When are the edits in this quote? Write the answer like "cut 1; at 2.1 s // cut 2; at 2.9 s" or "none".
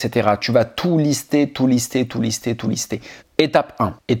cut 1; at 3.2 s